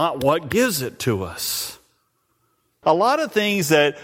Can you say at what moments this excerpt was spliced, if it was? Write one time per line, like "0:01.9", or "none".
0:02.8